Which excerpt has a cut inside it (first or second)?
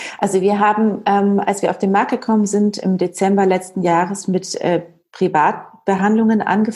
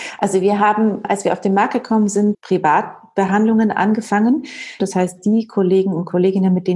second